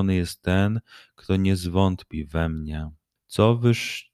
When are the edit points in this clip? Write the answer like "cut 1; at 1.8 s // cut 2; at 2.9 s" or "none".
cut 1; at 3.2 s